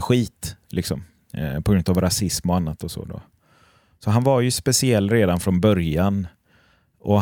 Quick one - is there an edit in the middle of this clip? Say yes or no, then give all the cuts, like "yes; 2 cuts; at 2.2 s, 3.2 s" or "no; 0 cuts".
no; 0 cuts